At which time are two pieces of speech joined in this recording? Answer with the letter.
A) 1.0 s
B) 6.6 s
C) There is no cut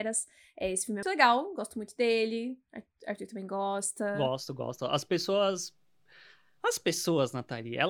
A